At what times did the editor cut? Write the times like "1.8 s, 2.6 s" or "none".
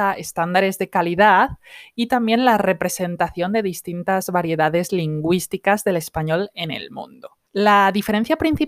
7.4 s